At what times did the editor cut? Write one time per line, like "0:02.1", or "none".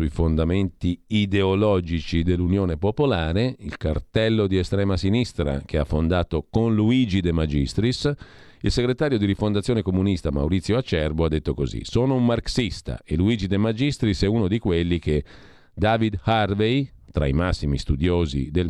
none